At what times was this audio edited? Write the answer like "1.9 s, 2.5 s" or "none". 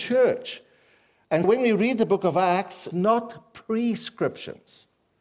1.4 s, 2.9 s